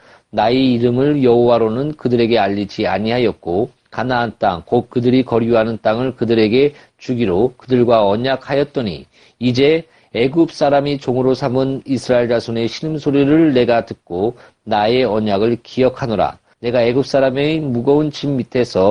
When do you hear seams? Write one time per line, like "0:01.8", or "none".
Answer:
0:16.5